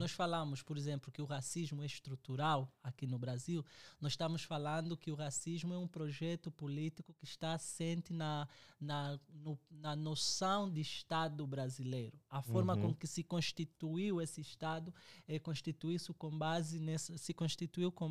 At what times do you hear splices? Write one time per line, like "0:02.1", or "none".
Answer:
none